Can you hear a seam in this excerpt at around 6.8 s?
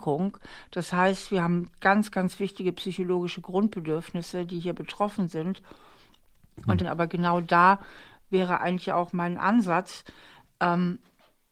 yes; 1 cut; at 6.8 s

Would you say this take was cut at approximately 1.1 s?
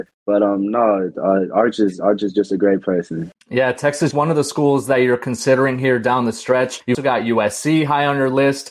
no; 2 cuts; at 4.1 s, 6.9 s

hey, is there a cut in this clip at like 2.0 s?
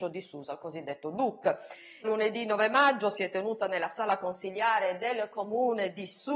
yes; 1 cut; at 2.0 s

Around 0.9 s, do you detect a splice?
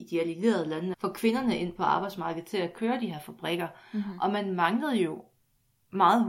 yes; 1 cut; at 0.9 s

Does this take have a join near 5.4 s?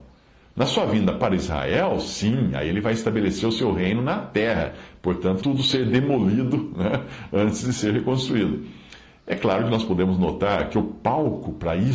yes; 1 cut; at 5.4 s

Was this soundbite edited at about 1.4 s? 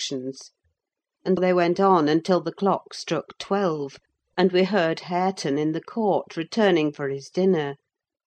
yes; 1 cut; at 1.4 s

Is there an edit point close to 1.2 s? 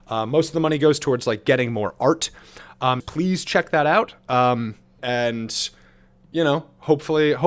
no; 2 cuts; at 3.0 s, 5.0 s

